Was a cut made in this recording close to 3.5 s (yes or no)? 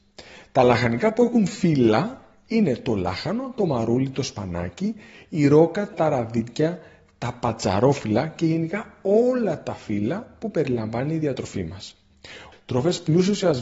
no